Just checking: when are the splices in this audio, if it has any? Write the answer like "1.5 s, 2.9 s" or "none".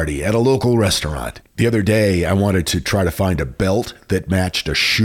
1.5 s